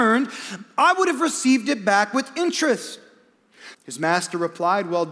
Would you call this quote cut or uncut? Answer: cut